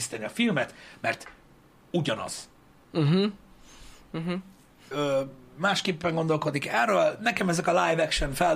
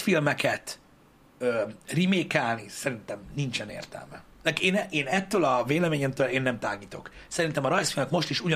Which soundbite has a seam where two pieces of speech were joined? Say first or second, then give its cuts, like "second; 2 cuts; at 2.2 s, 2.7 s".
first; 1 cut; at 4.9 s